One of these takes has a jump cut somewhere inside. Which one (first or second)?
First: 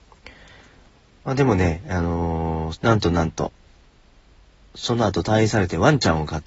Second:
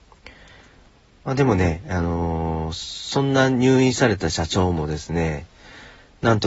first